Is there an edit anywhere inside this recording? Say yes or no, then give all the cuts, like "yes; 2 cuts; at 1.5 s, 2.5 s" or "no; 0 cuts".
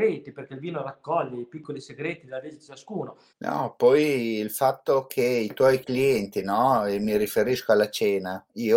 yes; 1 cut; at 3.3 s